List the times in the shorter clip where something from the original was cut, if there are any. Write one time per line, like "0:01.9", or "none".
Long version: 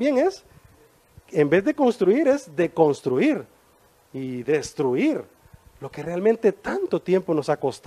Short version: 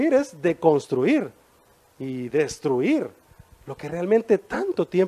none